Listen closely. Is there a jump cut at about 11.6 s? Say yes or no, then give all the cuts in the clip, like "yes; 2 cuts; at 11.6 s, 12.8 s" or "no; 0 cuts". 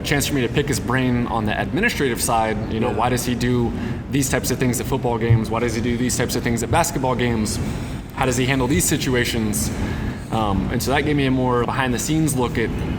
yes; 1 cut; at 11.6 s